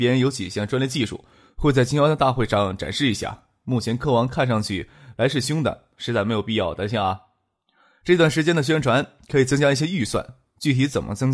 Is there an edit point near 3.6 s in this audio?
no; 1 cut; at 5.4 s

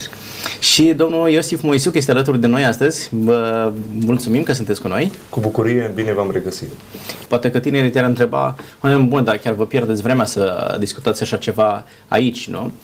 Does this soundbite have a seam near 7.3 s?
yes; 1 cut; at 7.3 s

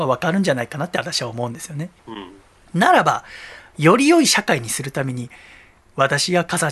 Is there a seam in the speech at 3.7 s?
no; 1 cut; at 2.0 s

